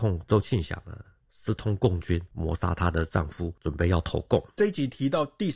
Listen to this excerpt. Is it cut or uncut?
uncut